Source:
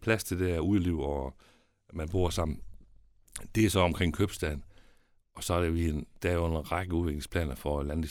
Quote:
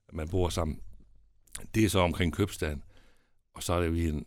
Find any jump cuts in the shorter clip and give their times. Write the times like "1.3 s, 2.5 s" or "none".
none

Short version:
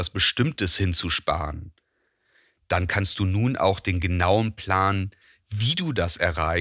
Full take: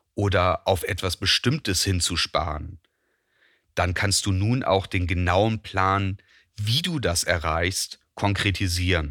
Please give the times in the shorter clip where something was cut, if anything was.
none

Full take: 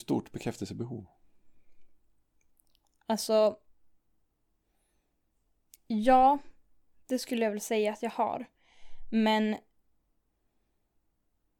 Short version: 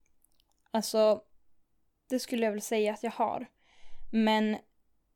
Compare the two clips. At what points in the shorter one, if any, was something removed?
2.1 s

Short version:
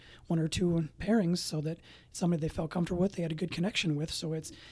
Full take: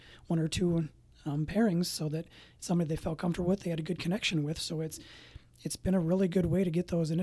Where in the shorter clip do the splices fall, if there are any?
1.0 s

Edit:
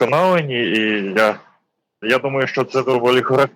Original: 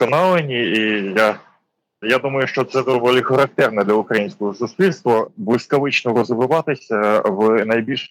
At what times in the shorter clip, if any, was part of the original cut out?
none

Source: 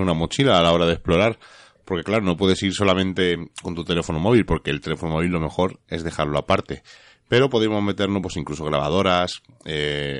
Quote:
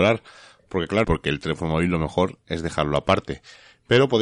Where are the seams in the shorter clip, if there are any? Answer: 1.0 s

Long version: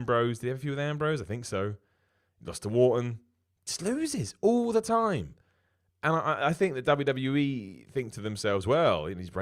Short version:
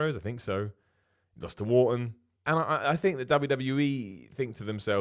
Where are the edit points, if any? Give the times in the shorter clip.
2.4 s

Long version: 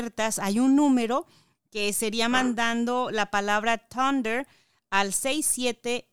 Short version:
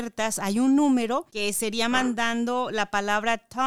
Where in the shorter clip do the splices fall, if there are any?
1.3 s

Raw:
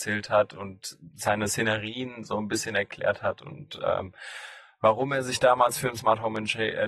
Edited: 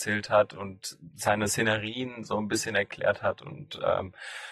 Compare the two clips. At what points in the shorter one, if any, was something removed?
none

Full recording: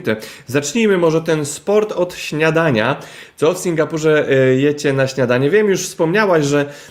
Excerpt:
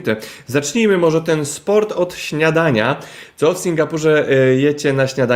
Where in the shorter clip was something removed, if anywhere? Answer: none

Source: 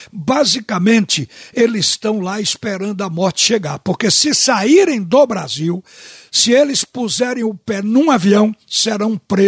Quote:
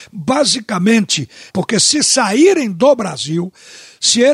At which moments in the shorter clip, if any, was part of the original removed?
1.5 s

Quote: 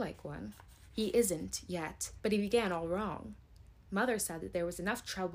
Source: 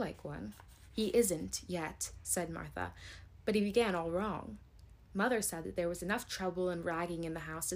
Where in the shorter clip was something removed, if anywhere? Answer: 2.2 s

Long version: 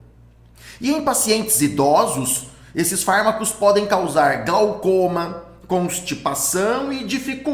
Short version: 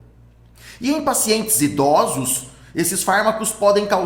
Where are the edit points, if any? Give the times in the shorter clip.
none

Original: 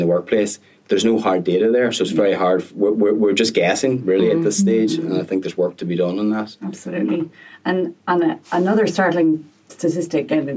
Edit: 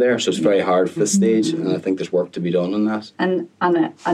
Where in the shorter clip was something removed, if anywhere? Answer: 1.0 s, 3.1 s

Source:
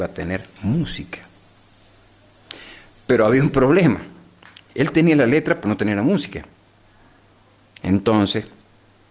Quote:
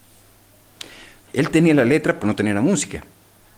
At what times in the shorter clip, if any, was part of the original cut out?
1.2 s

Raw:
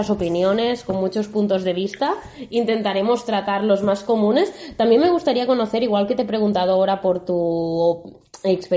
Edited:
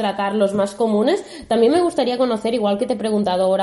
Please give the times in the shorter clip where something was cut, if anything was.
none

